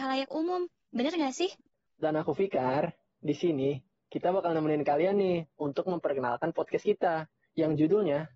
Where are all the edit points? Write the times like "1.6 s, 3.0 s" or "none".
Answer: 1.9 s